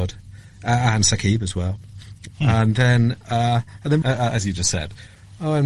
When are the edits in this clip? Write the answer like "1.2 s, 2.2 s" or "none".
2.3 s, 4.0 s